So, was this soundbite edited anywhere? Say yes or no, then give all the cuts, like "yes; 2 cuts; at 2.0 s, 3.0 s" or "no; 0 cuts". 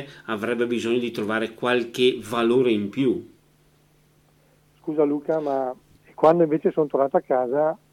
yes; 1 cut; at 6.0 s